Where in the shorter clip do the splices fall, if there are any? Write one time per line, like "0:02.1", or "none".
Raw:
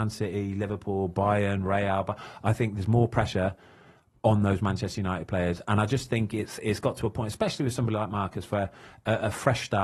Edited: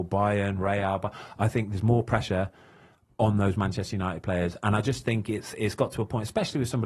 none